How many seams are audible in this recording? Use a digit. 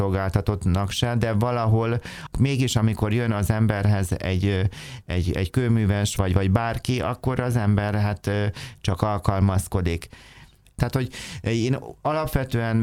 1